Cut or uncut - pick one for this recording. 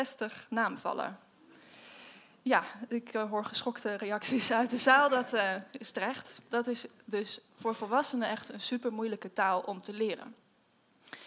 uncut